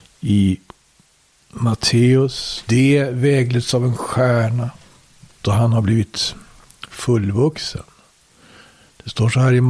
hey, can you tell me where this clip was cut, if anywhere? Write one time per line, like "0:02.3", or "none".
0:02.7
0:05.4